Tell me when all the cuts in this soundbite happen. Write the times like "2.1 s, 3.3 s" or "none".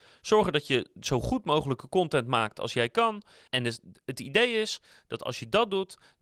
3.5 s